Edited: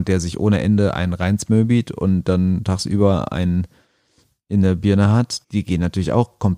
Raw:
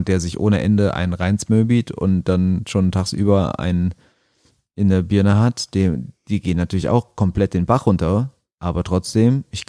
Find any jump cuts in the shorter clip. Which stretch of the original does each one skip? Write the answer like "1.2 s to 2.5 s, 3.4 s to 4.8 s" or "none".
2.7 s to 2.9 s, 5.7 s to 6.2 s